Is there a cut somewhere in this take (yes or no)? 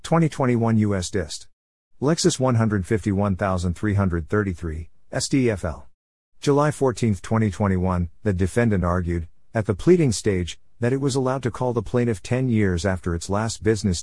no